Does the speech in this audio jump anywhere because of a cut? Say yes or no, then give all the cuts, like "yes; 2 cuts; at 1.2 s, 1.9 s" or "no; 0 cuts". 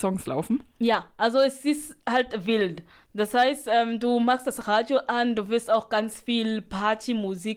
no; 0 cuts